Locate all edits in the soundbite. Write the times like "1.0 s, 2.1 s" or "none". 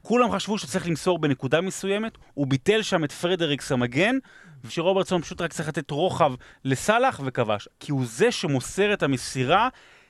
2.2 s, 4.7 s, 7.7 s